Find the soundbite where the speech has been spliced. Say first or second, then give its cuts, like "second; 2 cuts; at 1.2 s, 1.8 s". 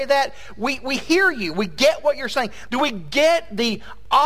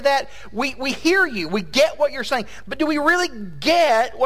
first; 1 cut; at 2.7 s